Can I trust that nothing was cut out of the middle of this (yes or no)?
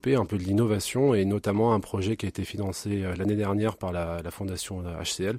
yes